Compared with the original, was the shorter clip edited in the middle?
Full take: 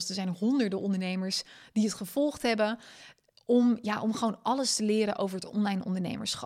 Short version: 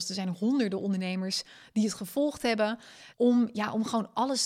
yes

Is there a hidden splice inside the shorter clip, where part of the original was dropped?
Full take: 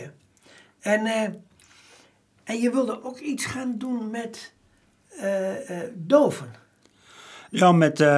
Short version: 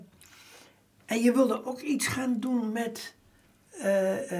no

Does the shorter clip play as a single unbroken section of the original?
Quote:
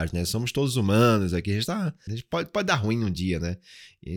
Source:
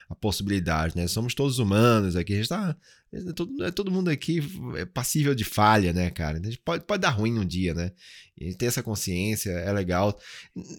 no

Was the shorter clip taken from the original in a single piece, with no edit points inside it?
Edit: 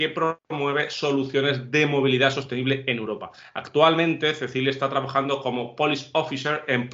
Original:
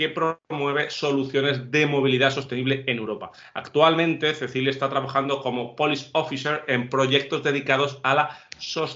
yes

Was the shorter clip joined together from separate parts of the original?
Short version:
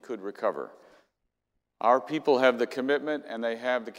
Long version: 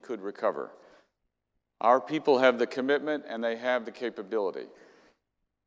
no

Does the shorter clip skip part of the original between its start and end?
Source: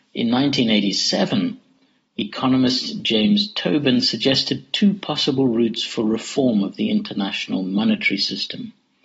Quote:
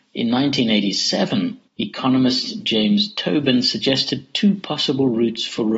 yes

